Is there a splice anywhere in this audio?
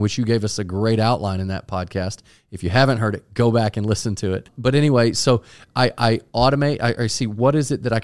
no; 0 cuts

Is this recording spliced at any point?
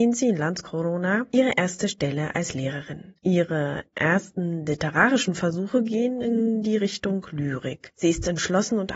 yes; 2 cuts; at 3.2 s, 7.9 s

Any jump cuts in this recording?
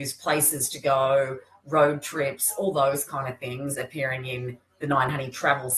no; 0 cuts

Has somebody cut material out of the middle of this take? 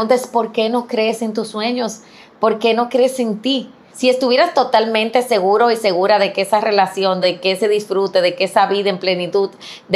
yes; 2 cuts; at 3.9 s, 7.2 s

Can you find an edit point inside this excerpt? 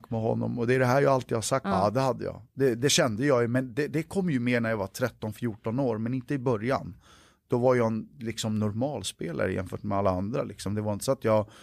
yes; 1 cut; at 1.6 s

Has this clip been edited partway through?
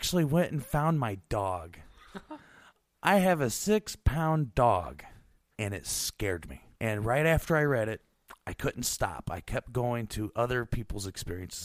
yes; 2 cuts; at 5.5 s, 6.7 s

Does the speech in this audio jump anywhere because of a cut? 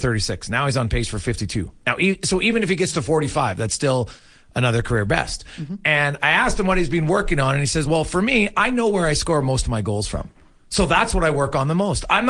no; 0 cuts

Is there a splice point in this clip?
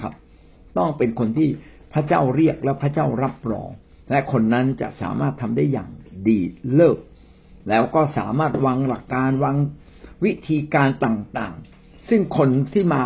yes; 1 cut; at 9.0 s

